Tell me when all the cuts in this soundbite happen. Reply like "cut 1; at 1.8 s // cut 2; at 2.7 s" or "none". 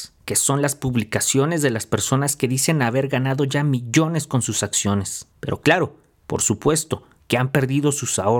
cut 1; at 5.3 s // cut 2; at 7.2 s